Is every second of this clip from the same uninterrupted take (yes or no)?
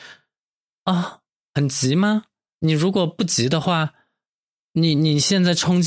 yes